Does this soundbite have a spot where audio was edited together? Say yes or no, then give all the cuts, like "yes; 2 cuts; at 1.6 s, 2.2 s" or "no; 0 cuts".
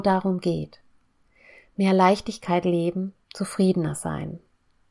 no; 0 cuts